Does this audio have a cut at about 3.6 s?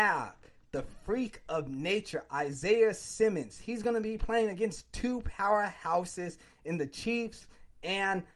no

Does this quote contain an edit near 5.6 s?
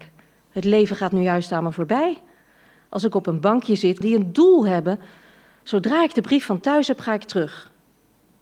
no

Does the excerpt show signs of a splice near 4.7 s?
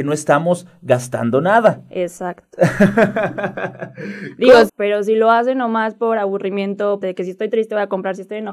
yes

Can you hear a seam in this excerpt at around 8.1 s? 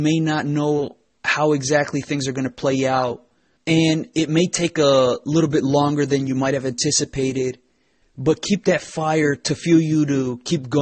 no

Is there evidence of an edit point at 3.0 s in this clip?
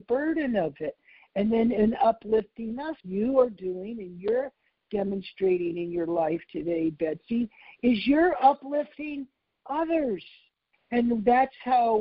yes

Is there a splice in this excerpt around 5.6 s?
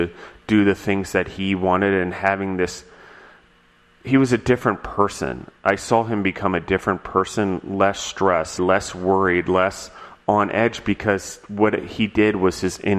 no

